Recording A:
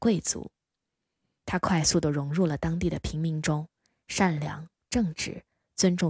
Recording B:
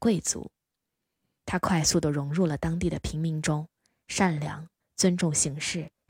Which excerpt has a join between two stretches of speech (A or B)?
B